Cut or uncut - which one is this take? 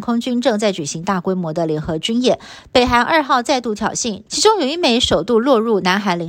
cut